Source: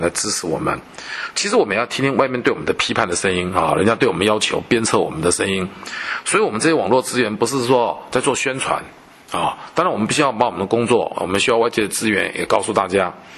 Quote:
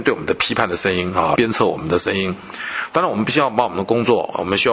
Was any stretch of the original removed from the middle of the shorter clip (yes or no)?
yes